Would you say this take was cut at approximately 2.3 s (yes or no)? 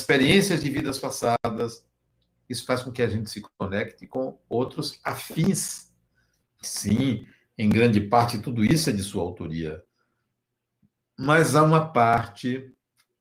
no